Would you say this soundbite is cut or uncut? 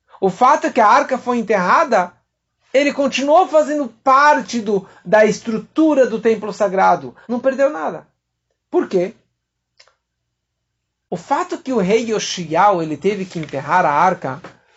cut